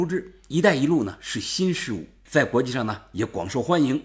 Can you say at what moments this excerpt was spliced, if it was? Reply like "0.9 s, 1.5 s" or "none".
2.3 s